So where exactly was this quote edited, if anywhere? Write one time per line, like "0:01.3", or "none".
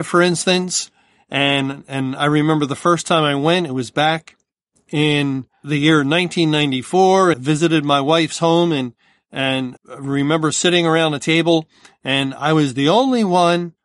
0:07.3
0:09.8